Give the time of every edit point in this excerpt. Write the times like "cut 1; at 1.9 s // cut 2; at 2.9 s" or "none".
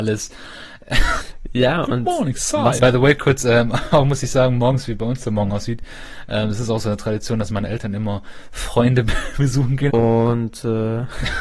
cut 1; at 1.2 s // cut 2; at 2.8 s // cut 3; at 9.9 s